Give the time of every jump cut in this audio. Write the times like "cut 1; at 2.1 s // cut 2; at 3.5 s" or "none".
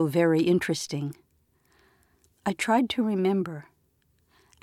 none

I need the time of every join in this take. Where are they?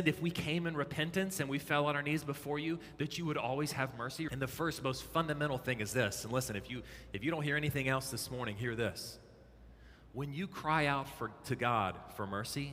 cut 1; at 4.3 s

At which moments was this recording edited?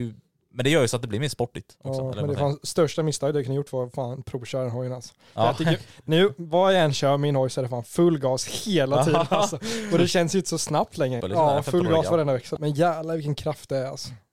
cut 1; at 11.2 s // cut 2; at 12.6 s

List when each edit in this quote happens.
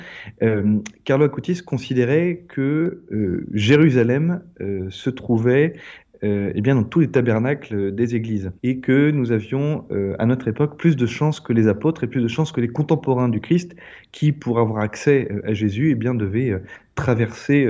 cut 1; at 8.6 s

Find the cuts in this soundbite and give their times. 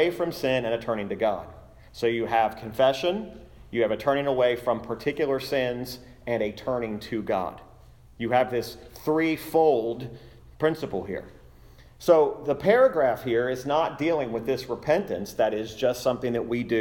none

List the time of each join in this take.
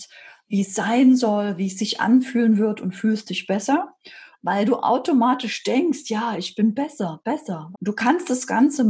cut 1; at 4.3 s // cut 2; at 7.7 s

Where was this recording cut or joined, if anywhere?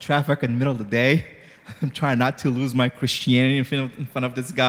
none

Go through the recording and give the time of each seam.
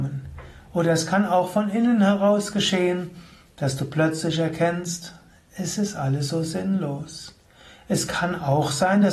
none

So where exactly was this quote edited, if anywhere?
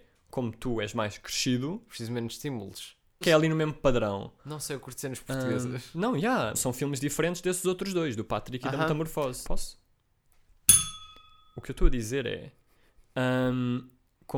cut 1; at 3.2 s // cut 2; at 6.5 s // cut 3; at 9.4 s

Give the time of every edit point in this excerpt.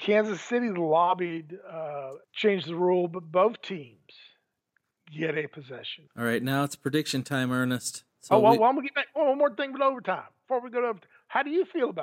cut 1; at 2.2 s // cut 2; at 6.1 s // cut 3; at 8.1 s

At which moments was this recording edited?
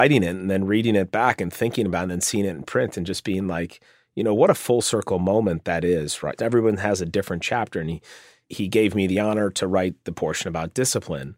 cut 1; at 6.4 s

